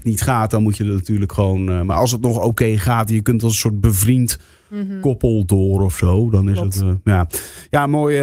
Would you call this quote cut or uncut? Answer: uncut